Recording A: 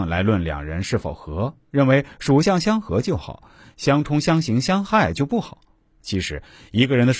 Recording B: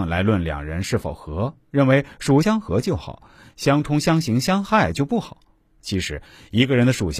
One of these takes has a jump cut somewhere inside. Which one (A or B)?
B